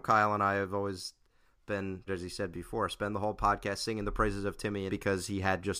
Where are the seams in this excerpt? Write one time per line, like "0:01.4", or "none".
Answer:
0:02.1
0:04.9